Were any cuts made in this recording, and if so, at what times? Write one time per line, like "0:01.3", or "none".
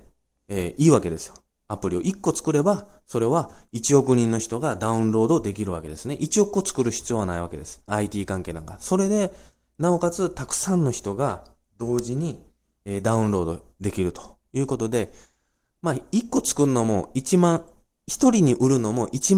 0:07.9

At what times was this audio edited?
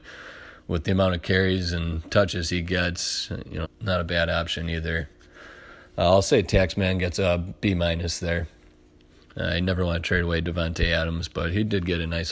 0:03.6

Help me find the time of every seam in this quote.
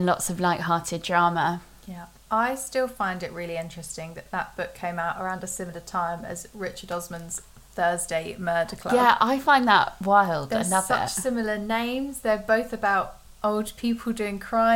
none

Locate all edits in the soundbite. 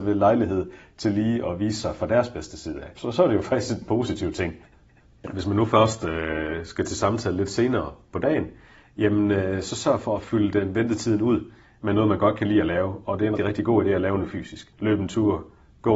0:13.4

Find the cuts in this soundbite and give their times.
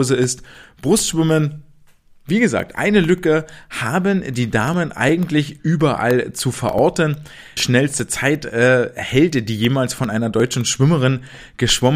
0:07.6

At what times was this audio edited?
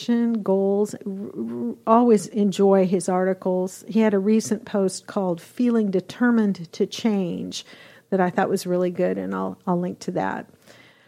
0:01.0

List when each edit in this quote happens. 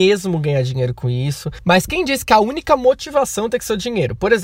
none

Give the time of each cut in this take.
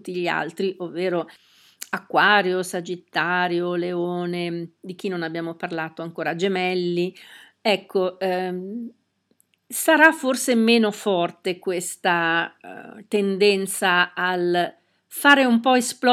none

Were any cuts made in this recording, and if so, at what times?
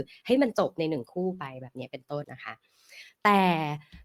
0:02.2

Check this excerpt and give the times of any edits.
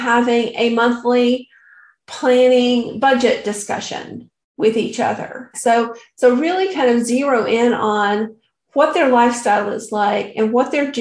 0:05.5

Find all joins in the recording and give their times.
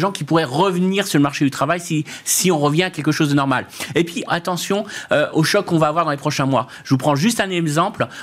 0:04.3

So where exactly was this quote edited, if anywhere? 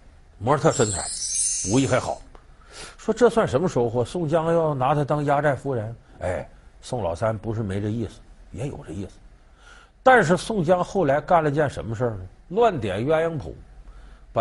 none

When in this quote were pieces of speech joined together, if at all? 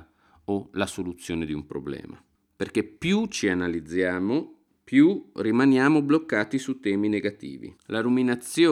0:07.8

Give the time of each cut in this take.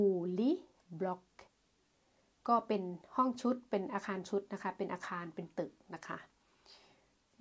none

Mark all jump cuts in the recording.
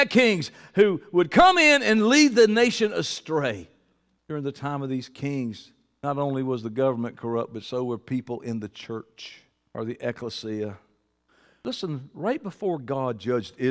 none

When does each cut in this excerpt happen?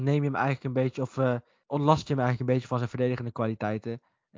0:01.6

